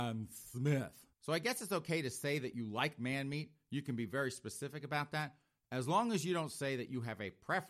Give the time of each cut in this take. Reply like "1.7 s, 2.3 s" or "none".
1.1 s